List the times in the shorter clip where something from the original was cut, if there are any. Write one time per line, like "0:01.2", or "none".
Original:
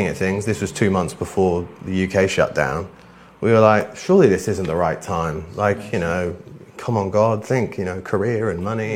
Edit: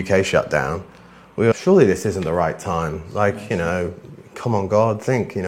0:01.5